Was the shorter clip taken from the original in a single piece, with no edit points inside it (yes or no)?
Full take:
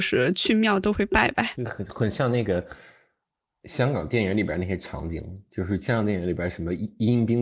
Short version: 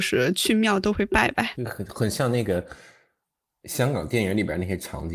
yes